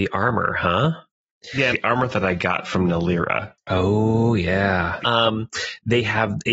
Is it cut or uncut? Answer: cut